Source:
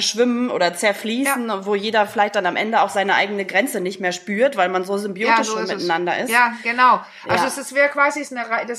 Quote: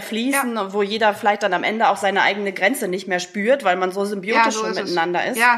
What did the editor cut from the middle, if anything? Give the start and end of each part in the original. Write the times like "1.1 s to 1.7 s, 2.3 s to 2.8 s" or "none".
none